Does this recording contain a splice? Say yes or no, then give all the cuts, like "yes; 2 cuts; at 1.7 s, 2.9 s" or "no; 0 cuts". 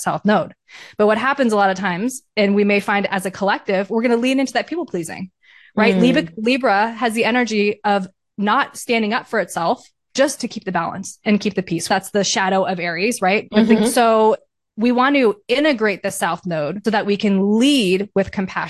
yes; 3 cuts; at 11.9 s, 13.8 s, 16.8 s